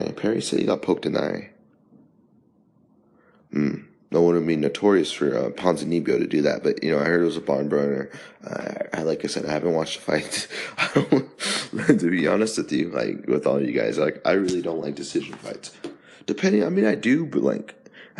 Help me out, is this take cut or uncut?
uncut